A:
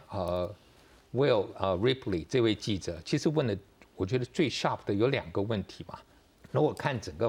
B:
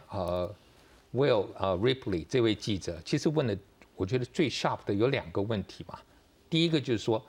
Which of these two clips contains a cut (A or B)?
A